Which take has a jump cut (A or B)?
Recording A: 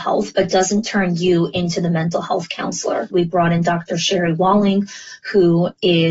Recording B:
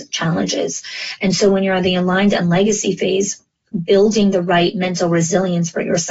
A